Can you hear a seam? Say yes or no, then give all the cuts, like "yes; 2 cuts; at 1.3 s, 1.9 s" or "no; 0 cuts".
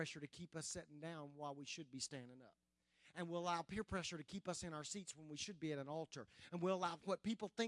no; 0 cuts